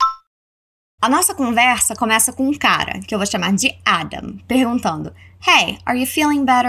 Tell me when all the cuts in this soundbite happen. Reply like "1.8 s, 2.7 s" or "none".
1.0 s